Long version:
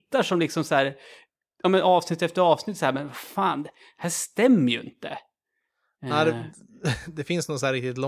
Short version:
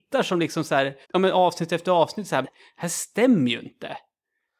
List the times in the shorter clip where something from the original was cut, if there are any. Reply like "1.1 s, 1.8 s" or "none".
1.0 s, 2.4 s